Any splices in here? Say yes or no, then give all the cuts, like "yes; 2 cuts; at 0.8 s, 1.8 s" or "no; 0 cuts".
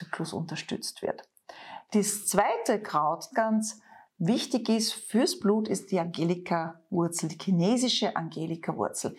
yes; 2 cuts; at 1.9 s, 3.3 s